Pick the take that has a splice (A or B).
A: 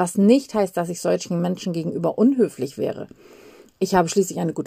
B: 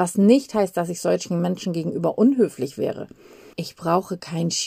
B